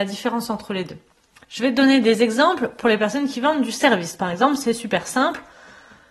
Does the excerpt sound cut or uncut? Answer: uncut